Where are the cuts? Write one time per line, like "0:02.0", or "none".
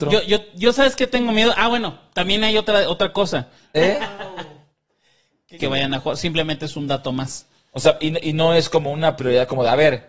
0:03.7
0:05.6